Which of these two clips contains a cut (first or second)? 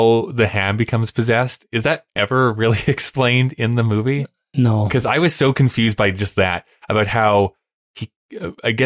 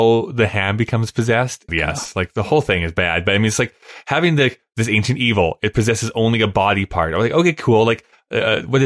second